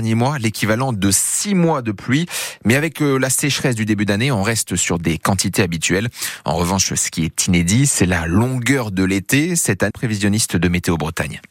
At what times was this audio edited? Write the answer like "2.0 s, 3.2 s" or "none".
9.9 s